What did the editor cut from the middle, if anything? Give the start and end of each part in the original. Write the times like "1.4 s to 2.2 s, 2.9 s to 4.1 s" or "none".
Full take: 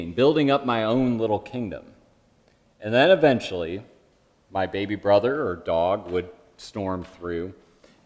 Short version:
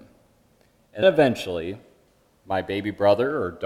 2.9 s to 3.1 s